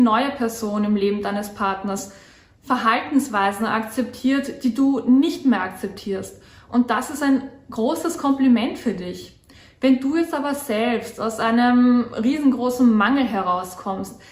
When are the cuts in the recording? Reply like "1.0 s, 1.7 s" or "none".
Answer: none